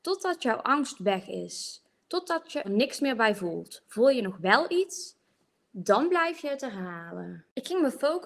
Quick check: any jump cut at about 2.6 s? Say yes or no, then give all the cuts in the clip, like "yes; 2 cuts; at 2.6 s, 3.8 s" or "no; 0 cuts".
yes; 1 cut; at 2.6 s